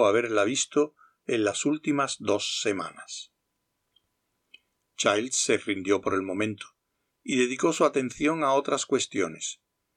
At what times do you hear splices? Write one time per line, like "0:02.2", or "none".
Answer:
none